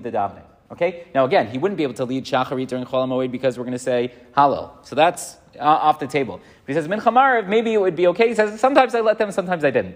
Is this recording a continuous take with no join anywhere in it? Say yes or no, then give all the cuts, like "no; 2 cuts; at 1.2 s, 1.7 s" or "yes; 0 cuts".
yes; 0 cuts